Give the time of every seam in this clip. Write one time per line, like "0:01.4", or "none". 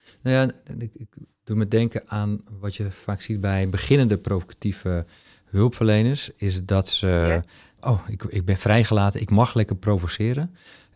0:07.8